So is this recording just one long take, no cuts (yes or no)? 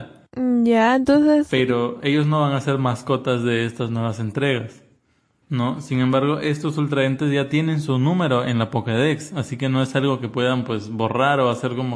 no